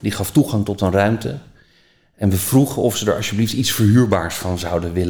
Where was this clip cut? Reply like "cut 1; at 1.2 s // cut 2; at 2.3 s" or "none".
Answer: none